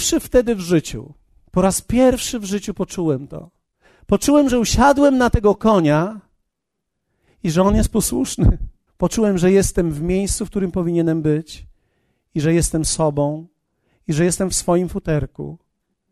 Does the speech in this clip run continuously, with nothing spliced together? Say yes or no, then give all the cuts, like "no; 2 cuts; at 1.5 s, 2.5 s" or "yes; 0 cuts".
no; 1 cut; at 8.9 s